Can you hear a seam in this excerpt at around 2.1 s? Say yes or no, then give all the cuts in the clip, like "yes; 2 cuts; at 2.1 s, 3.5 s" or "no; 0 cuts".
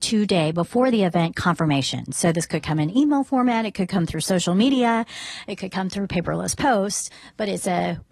no; 0 cuts